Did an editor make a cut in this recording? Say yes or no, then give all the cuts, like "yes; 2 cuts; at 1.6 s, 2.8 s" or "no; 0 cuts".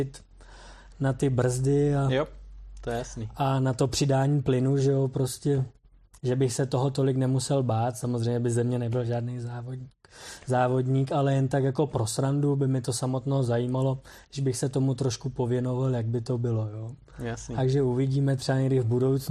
no; 0 cuts